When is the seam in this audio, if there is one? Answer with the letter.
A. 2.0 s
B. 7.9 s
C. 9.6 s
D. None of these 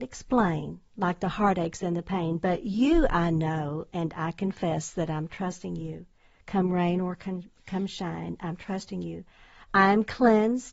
D